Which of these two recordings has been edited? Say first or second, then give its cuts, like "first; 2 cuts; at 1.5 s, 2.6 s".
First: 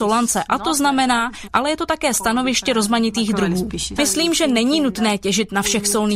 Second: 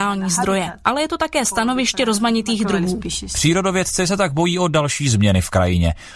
first; 2 cuts; at 1.5 s, 4.0 s